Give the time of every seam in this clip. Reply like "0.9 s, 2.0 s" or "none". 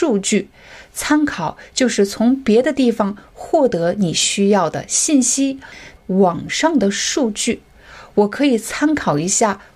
6.0 s